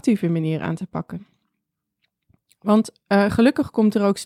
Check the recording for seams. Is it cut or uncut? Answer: uncut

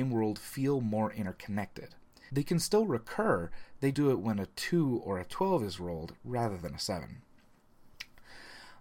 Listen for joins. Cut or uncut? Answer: cut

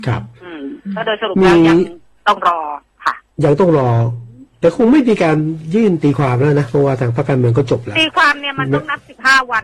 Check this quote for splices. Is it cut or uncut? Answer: uncut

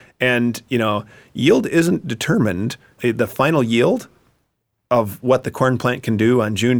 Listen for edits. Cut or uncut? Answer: cut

